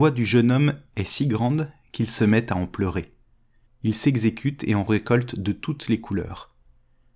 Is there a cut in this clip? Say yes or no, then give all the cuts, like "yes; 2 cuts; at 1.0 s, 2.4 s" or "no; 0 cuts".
yes; 1 cut; at 3.7 s